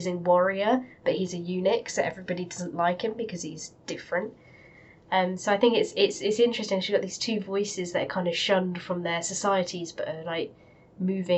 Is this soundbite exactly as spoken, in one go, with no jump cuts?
yes; 0 cuts

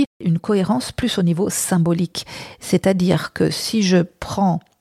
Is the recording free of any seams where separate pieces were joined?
yes; 0 cuts

